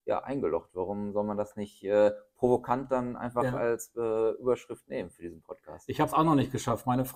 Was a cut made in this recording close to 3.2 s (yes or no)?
no